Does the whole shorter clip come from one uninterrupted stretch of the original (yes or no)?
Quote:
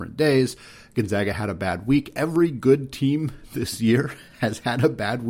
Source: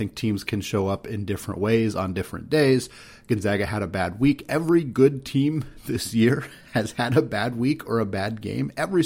yes